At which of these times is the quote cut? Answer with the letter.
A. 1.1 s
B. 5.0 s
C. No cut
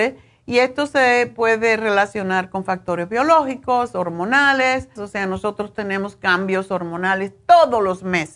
B